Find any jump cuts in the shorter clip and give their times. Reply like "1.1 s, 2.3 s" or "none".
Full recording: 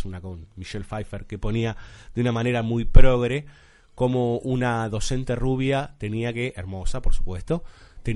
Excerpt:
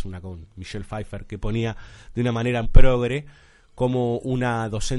2.6 s

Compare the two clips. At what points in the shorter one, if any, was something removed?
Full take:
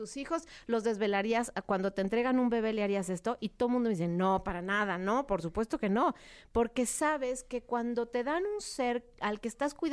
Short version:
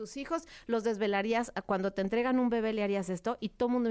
none

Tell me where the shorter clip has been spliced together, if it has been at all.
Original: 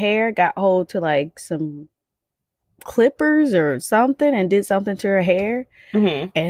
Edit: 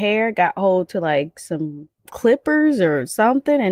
2.0 s

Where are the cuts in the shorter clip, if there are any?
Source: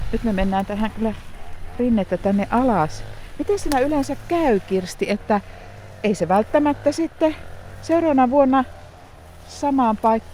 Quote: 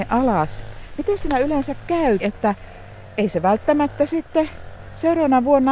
2.2 s

